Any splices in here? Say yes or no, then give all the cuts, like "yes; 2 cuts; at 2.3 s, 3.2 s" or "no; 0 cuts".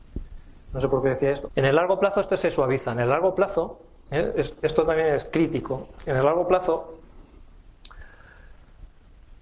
yes; 1 cut; at 1.5 s